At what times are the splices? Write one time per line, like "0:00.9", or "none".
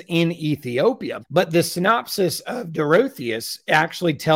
0:01.2